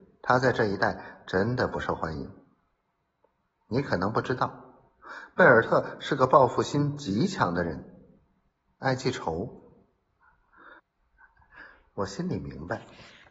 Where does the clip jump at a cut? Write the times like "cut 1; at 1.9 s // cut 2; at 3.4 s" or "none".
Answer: cut 1; at 10.8 s